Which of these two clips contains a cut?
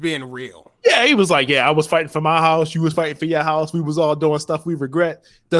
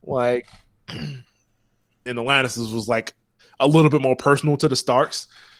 second; 1 cut; at 2.1 s

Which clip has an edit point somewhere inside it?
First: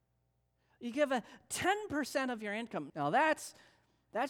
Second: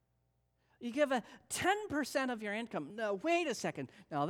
first; 1 cut; at 2.9 s

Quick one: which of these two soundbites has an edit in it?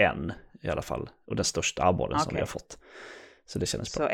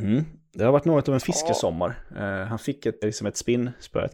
second; 1 cut; at 3.0 s

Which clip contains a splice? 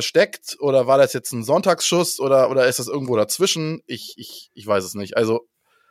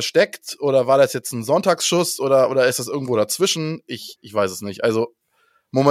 second; 1 cut; at 4.2 s

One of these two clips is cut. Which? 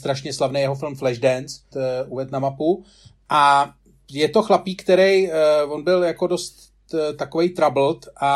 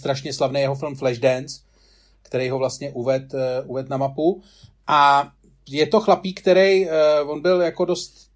first; 1 cut; at 1.7 s

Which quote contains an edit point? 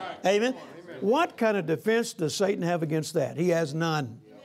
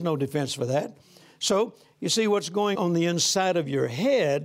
second; 1 cut; at 2.7 s

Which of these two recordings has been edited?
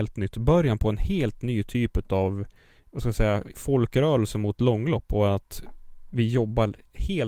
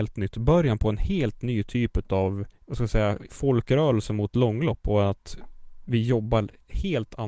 second; 1 cut; at 2.6 s

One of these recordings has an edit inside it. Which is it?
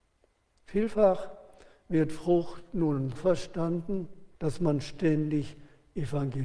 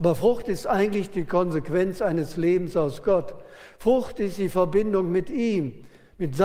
first; 2 cuts; at 3.2 s, 4.3 s

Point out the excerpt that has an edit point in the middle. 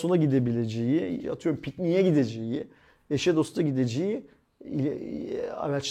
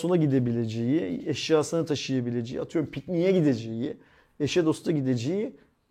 first; 1 cut; at 1.2 s

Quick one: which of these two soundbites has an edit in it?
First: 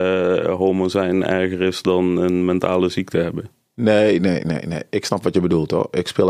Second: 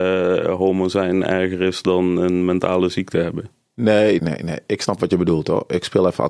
second; 1 cut; at 4.2 s

